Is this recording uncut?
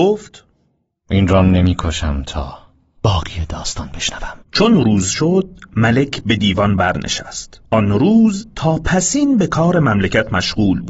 no; 2 cuts; at 4.4 s, 7.7 s

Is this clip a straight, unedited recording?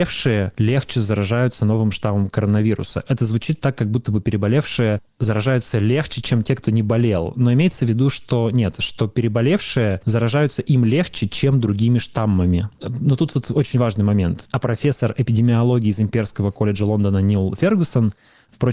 no; 2 cuts; at 12.8 s, 14.5 s

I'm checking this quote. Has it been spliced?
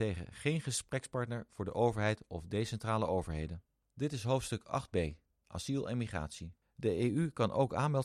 yes; 1 cut; at 6.6 s

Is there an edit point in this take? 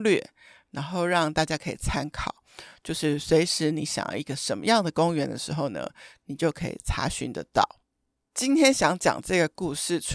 no; 0 cuts

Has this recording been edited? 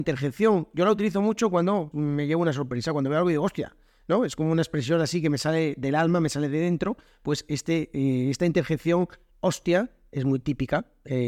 yes; 1 cut; at 1.9 s

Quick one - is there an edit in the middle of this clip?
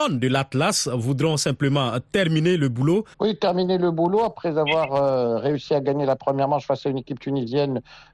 yes; 1 cut; at 3.1 s

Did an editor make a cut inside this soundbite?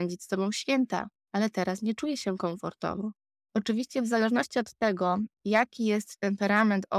yes; 1 cut; at 3.5 s

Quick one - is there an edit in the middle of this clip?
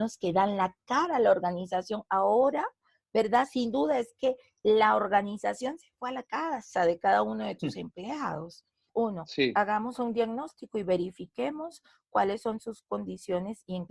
no; 0 cuts

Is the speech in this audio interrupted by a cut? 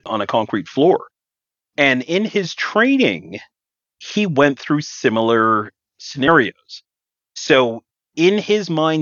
no; 0 cuts

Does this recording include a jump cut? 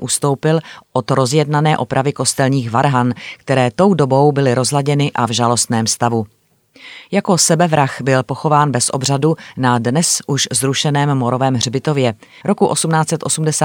yes; 1 cut; at 12.4 s

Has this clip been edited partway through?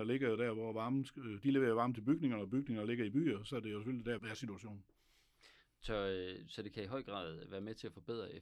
yes; 1 cut; at 4.2 s

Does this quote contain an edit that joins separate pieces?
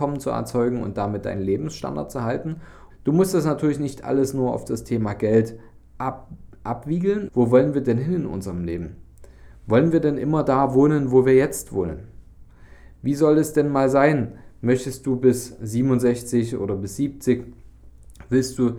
yes; 2 cuts; at 2.9 s, 7.3 s

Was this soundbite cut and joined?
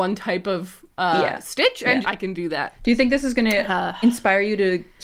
yes; 2 cuts; at 0.9 s, 2.0 s

